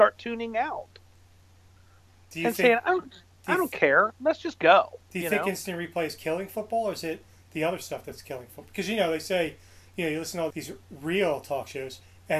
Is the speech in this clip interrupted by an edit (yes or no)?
yes